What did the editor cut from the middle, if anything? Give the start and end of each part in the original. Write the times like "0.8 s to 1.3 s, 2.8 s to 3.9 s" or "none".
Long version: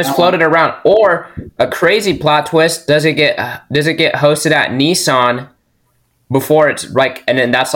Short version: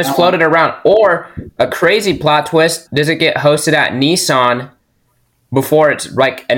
2.9 s to 3.6 s